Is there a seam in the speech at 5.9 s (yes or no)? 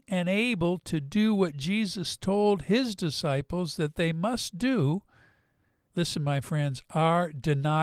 yes